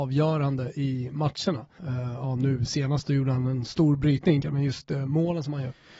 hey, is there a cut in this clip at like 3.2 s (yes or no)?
no